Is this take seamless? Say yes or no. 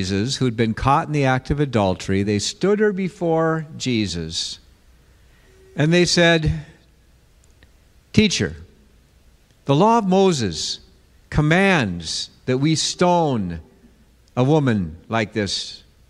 yes